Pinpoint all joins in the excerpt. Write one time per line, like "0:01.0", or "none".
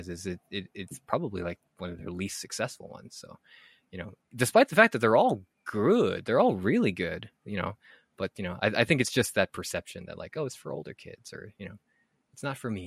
none